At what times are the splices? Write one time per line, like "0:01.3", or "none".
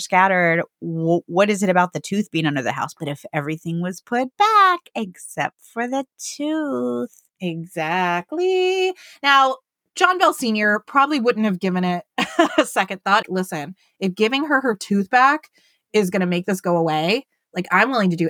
0:13.2